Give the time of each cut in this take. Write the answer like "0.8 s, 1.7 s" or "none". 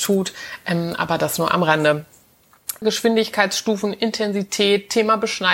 2.8 s